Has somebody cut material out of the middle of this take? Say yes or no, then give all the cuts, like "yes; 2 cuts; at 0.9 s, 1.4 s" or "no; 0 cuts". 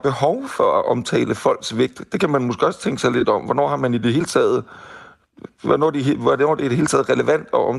no; 0 cuts